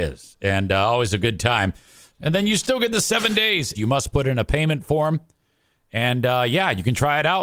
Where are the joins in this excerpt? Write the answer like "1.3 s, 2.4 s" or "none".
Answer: 2.1 s, 3.7 s